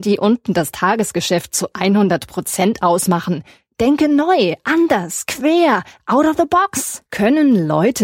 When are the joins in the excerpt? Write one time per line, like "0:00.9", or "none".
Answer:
0:07.1